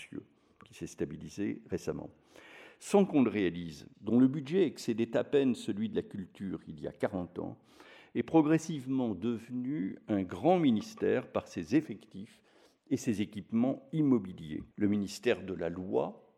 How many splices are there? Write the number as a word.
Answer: two